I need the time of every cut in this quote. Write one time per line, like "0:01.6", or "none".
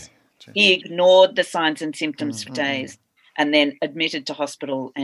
0:02.5